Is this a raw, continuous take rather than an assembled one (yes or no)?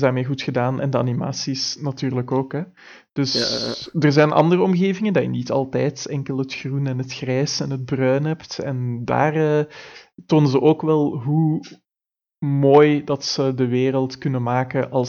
yes